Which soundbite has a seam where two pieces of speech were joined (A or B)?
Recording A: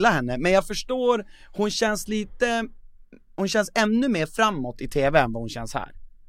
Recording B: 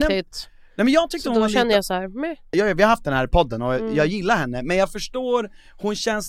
B